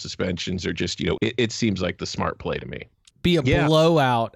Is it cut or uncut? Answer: cut